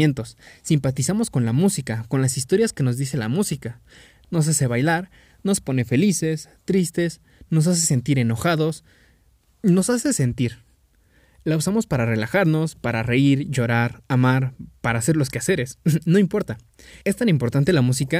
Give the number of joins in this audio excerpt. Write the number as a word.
zero